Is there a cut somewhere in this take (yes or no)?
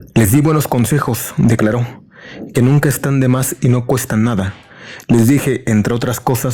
no